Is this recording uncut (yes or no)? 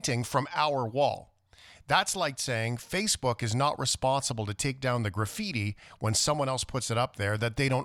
yes